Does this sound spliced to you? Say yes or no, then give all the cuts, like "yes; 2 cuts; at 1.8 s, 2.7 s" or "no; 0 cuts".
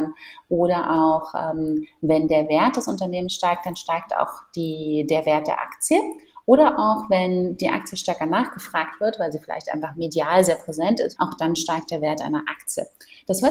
yes; 1 cut; at 11.2 s